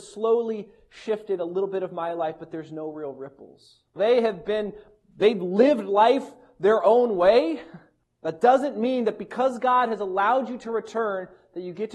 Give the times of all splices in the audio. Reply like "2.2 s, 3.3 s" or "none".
4.0 s, 8.0 s

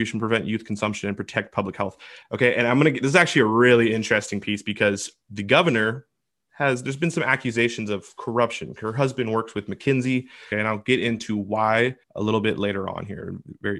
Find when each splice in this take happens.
2.2 s, 10.5 s, 12.0 s

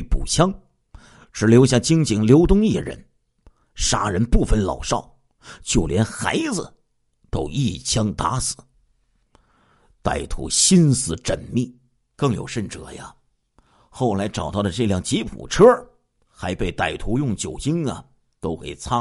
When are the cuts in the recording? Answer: 12.1 s

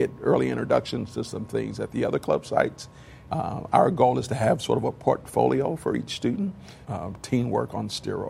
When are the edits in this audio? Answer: 3.3 s, 6.8 s

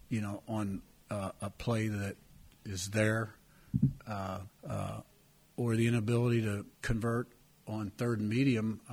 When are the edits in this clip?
4.5 s, 6.7 s

